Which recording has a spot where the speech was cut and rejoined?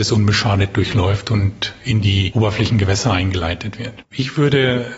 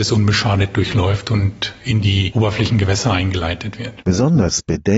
first; 1 cut; at 4.0 s

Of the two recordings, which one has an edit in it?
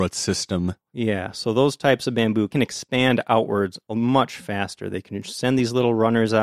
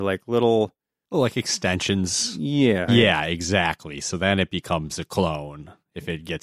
second; 1 cut; at 2.9 s

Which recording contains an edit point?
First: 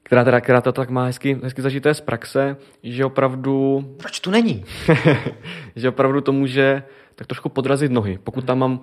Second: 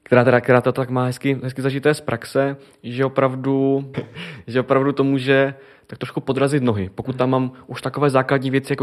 second; 1 cut; at 3.9 s

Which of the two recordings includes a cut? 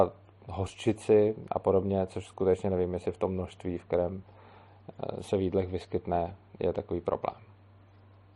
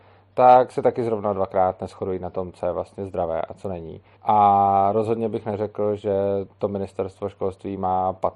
second; 1 cut; at 4.2 s

